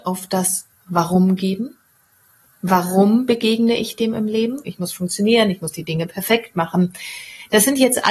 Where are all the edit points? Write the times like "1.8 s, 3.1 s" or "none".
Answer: 4.7 s

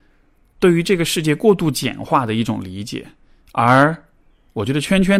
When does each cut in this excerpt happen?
none

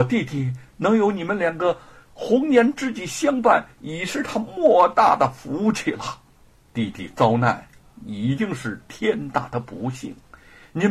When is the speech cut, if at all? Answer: 6.6 s

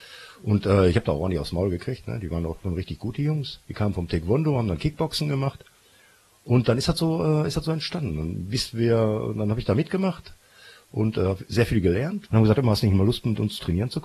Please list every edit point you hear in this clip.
12.3 s

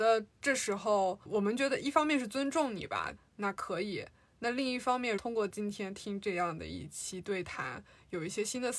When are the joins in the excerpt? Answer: 3.2 s, 5.2 s

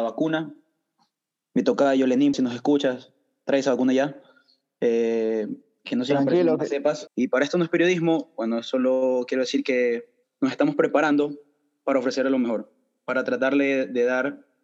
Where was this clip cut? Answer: 2.3 s, 7.1 s, 10.2 s

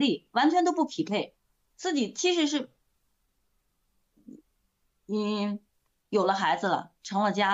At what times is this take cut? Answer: none

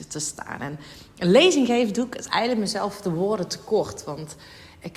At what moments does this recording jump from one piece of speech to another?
none

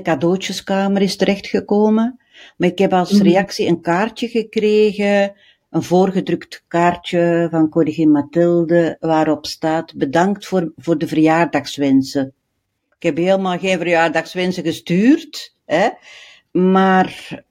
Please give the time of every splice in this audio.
16.5 s

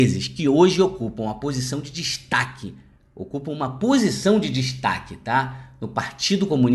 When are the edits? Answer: none

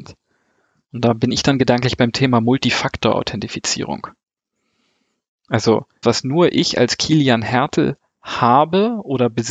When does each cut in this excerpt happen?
6.0 s

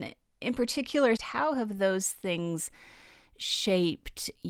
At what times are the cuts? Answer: 1.2 s

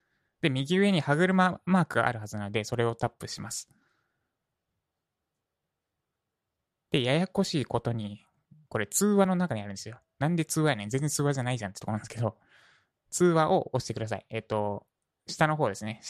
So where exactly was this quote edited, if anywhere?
none

